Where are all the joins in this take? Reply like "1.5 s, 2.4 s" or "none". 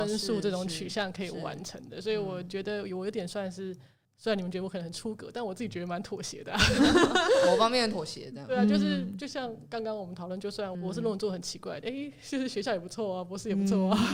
10.7 s, 11.8 s